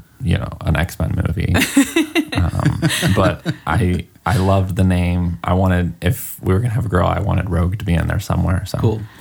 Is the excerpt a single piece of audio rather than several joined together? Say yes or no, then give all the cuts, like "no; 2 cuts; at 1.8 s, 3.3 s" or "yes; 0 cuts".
yes; 0 cuts